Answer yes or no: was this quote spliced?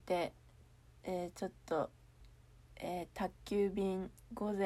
no